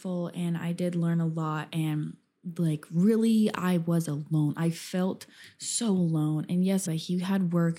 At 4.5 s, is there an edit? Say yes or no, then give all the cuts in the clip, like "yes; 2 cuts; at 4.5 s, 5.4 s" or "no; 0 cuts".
no; 1 cut; at 6.9 s